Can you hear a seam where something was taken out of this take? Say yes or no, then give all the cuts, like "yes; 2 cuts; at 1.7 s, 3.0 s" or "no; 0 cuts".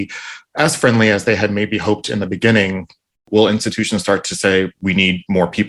no; 0 cuts